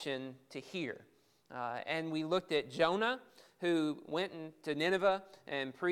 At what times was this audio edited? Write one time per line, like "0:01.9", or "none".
none